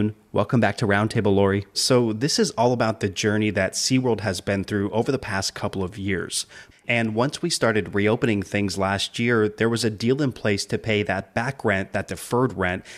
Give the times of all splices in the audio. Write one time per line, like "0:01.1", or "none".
0:01.7
0:06.7